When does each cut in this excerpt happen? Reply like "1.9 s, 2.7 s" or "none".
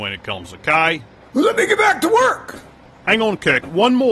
none